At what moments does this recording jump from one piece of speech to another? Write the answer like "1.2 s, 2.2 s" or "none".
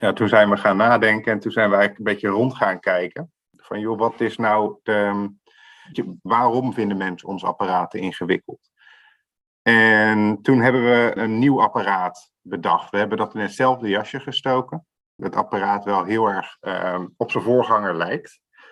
5.9 s, 11.2 s, 15.2 s